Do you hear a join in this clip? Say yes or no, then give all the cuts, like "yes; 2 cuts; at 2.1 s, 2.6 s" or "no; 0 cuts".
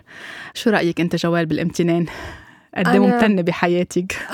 no; 0 cuts